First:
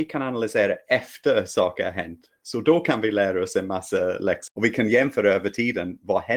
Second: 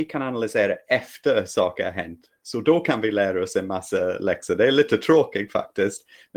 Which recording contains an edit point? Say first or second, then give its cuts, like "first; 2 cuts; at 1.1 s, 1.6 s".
first; 1 cut; at 4.5 s